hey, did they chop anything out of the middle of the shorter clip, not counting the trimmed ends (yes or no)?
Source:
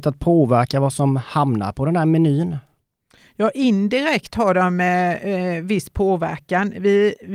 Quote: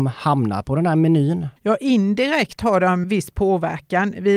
yes